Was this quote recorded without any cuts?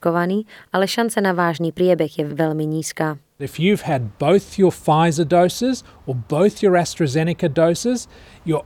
no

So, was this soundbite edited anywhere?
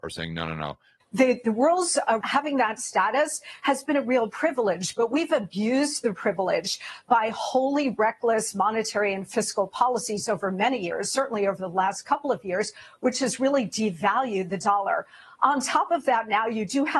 yes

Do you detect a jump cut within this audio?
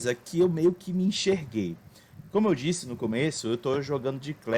no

